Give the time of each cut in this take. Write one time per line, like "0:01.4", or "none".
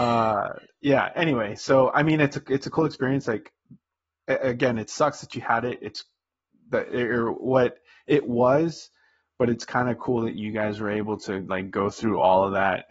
none